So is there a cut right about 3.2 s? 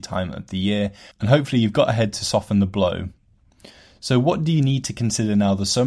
no; 0 cuts

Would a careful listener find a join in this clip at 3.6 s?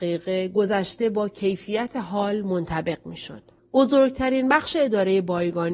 yes; 1 cut; at 3.6 s

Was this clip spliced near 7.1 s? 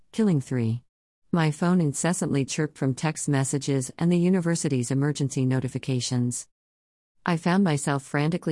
no; 1 cut; at 1.2 s

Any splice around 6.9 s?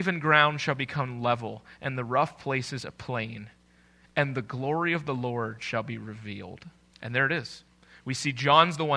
yes; 1 cut; at 6.9 s

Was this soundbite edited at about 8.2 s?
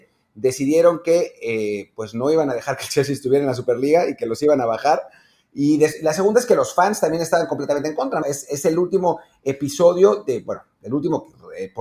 yes; 1 cut; at 8.2 s

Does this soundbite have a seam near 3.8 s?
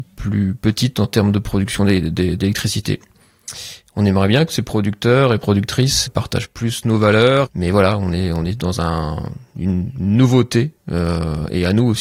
no; 2 cuts; at 6.1 s, 7.5 s

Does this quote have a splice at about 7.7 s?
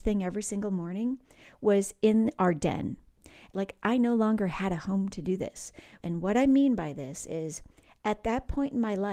no; 2 cuts; at 3.5 s, 6.0 s

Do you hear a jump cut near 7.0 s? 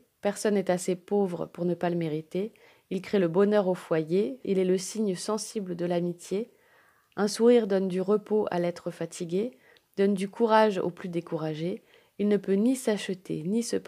no; 1 cut; at 4.4 s

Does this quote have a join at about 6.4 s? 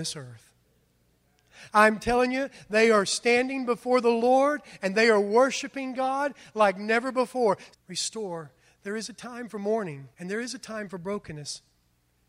no; 2 cuts; at 7.7 s, 10.1 s

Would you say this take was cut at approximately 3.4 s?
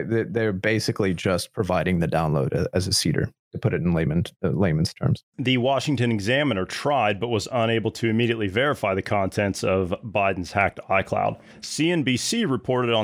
no; 0 cuts

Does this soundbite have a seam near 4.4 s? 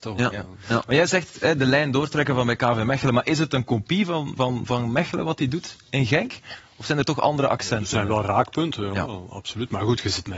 no; 0 cuts

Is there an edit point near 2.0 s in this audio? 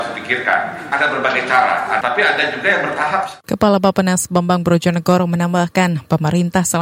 yes; 1 cut; at 2.0 s

